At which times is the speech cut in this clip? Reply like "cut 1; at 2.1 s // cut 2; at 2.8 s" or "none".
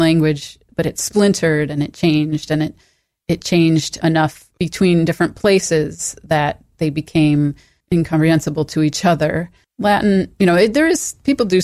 none